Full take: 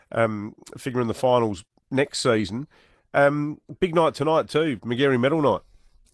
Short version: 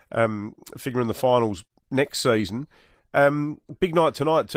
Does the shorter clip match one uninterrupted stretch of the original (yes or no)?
yes